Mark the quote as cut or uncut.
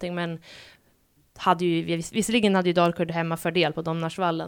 uncut